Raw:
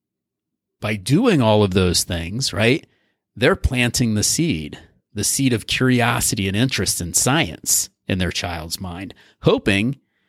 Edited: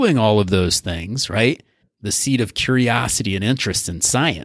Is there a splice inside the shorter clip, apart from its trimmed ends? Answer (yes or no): yes